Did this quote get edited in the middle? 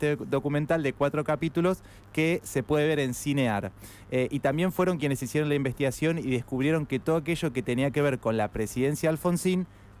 no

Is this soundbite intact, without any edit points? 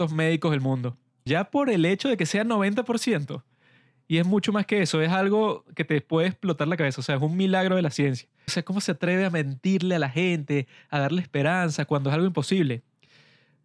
no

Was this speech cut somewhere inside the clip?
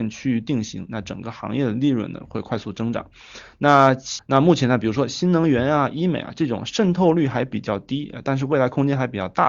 yes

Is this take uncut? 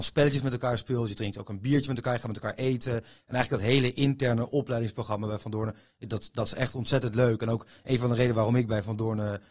yes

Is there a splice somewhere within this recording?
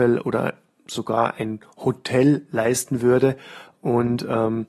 no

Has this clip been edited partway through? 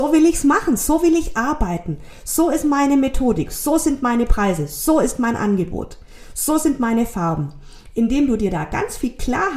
no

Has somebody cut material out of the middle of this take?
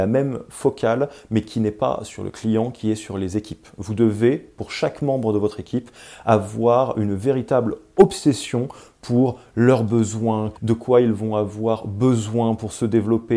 yes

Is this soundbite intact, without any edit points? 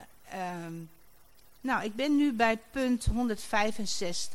yes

